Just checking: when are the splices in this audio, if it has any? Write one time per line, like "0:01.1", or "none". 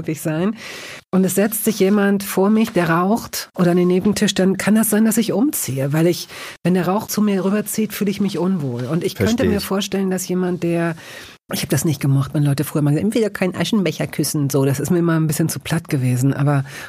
none

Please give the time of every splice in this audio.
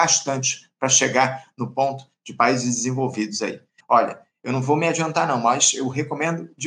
0:03.8

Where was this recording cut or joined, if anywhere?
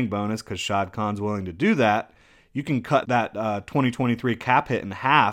0:03.0

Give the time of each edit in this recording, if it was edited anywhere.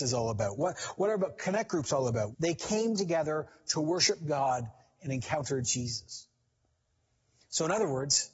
0:02.3

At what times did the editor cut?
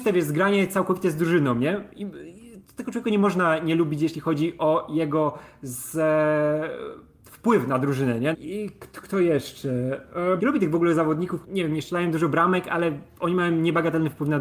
0:08.3
0:10.4
0:11.4

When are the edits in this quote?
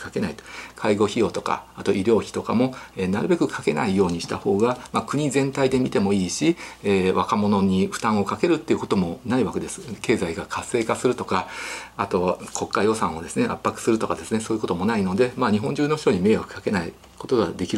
none

